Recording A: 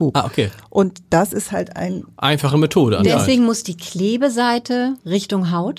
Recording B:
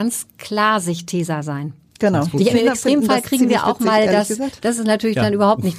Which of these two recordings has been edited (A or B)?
B